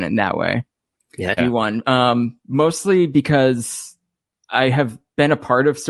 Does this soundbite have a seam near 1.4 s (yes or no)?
yes